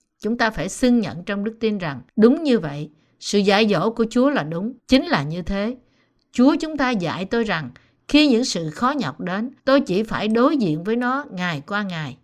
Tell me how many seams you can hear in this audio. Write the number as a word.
three